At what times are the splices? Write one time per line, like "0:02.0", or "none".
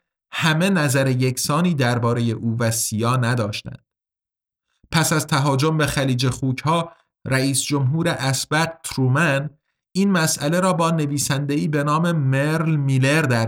none